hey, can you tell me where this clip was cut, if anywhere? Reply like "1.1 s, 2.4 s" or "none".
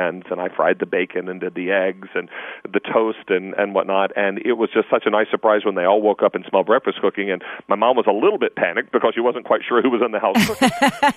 none